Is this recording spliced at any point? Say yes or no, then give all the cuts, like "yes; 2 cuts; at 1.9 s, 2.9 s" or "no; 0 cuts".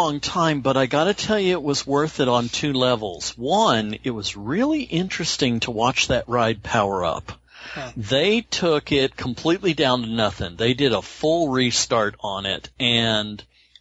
no; 0 cuts